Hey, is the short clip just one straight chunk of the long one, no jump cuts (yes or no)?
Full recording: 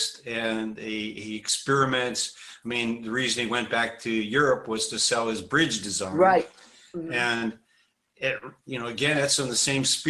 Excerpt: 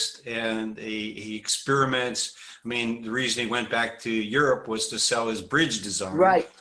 yes